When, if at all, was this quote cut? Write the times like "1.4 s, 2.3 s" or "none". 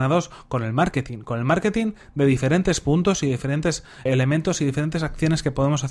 4.1 s